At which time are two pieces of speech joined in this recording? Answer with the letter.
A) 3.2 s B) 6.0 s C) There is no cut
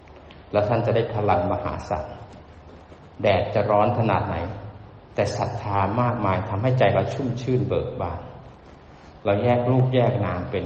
C